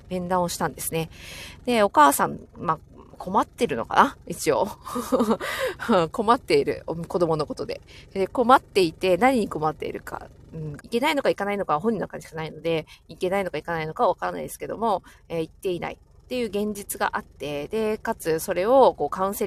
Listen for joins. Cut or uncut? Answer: cut